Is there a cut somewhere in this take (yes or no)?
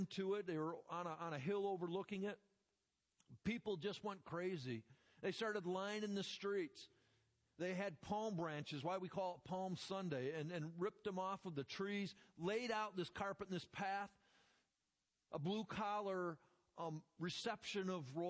no